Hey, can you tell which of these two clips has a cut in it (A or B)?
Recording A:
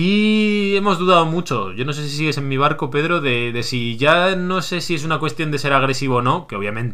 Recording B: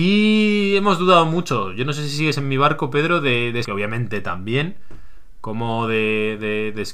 B